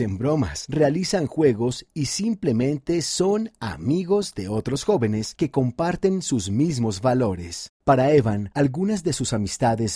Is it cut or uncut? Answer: cut